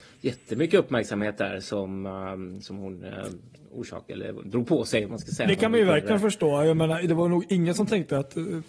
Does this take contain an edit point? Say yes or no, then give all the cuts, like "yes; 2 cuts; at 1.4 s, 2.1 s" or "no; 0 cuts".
no; 0 cuts